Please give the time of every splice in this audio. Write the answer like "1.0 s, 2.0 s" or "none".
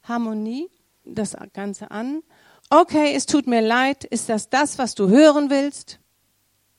1.0 s, 2.6 s